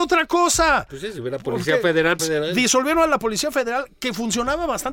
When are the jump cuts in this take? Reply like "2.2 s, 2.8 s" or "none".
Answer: 2.2 s

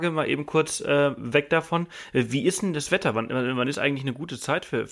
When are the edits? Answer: none

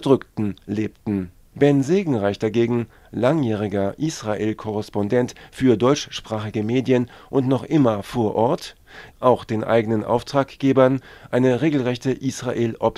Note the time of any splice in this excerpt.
1.5 s, 9.1 s

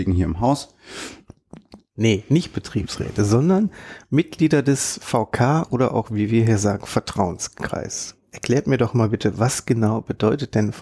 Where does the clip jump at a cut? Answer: 1.9 s

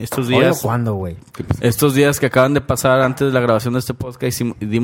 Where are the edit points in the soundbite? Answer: 1.3 s

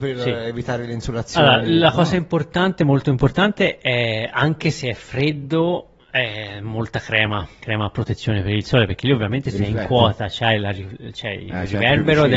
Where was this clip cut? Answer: 7.6 s

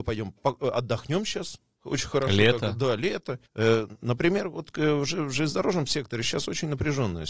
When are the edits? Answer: 3.5 s

